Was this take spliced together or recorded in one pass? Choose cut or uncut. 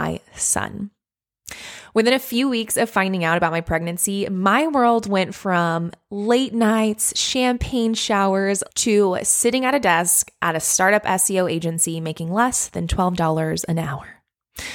cut